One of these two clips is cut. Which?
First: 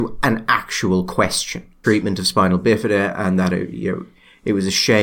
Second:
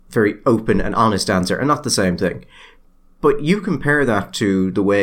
first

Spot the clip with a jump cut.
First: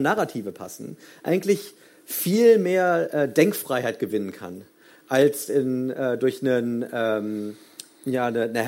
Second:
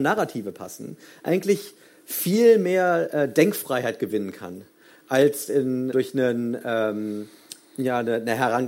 second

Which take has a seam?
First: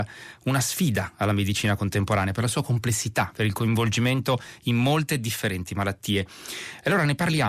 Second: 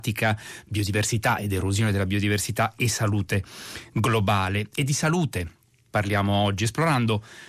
second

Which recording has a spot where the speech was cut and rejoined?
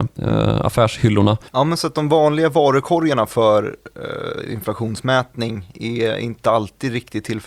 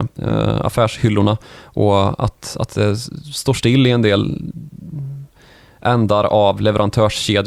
first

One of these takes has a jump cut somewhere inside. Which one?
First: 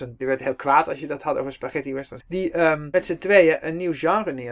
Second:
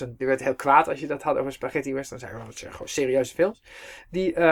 first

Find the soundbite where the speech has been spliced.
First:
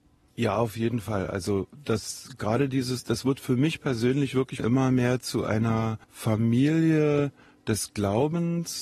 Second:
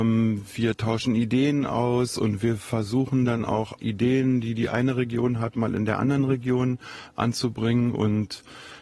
first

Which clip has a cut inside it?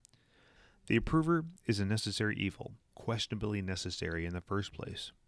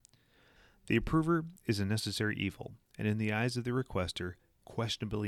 first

